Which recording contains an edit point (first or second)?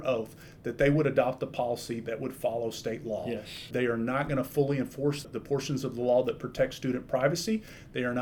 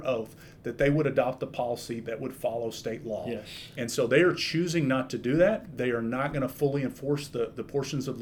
first